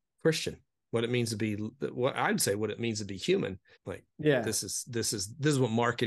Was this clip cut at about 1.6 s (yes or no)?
no